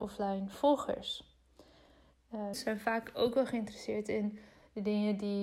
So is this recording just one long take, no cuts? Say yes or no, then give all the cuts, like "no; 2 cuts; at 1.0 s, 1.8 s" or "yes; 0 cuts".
no; 1 cut; at 2.5 s